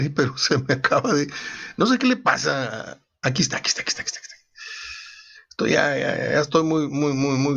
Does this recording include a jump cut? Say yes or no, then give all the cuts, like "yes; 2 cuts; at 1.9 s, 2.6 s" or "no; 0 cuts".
no; 0 cuts